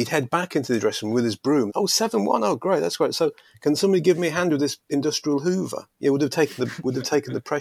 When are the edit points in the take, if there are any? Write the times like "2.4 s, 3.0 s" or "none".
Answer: 1.7 s

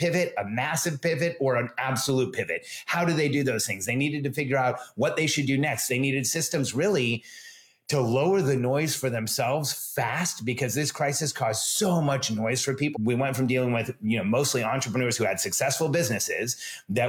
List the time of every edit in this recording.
12.9 s

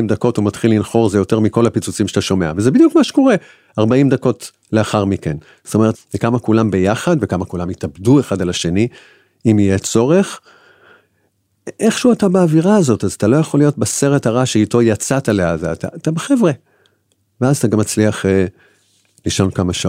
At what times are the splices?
5.9 s, 15.9 s

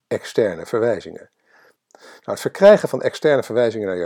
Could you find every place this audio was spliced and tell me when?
1.8 s

